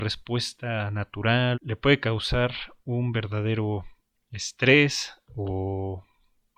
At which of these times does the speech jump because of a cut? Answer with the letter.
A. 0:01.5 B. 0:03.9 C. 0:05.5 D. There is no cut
A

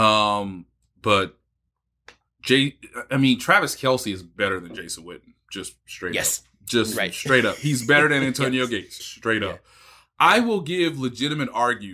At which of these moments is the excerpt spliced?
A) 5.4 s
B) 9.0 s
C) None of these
B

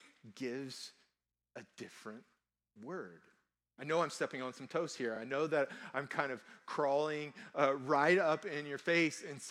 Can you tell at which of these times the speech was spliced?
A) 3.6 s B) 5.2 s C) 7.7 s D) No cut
D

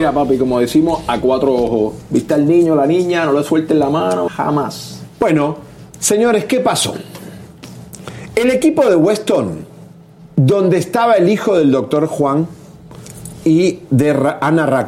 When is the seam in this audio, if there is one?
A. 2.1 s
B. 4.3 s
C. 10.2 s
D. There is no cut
B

